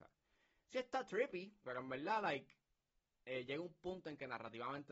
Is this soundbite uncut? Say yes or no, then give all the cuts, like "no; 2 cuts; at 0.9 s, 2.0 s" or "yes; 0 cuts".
no; 1 cut; at 1.6 s